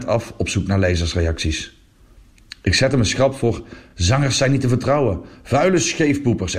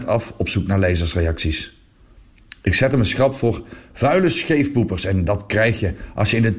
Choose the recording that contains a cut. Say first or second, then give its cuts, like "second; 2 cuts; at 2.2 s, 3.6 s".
second; 1 cut; at 3.9 s